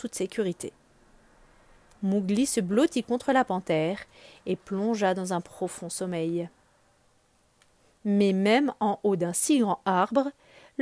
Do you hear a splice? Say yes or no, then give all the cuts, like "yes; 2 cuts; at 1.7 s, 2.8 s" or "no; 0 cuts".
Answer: no; 0 cuts